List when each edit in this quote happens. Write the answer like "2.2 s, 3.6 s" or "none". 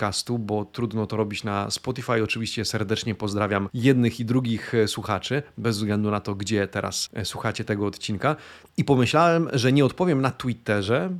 8.6 s